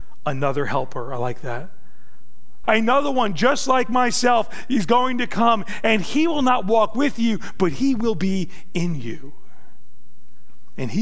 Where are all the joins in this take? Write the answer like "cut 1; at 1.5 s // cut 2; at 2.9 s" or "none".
cut 1; at 2.6 s